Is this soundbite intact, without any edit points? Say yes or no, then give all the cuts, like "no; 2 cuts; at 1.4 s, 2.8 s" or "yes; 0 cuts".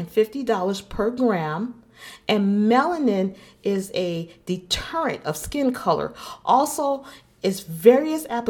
yes; 0 cuts